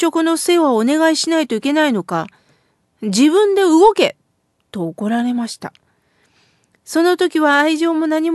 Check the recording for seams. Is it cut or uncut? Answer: uncut